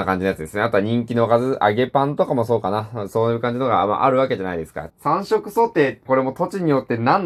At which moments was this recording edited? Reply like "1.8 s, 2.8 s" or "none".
4.9 s, 6.1 s